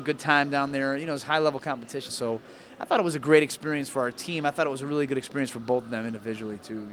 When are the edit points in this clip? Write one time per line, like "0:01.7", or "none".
0:02.1